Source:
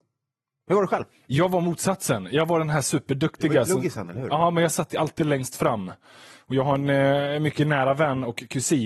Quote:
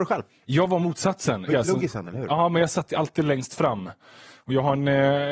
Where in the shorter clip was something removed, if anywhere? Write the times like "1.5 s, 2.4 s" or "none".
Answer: 1.5 s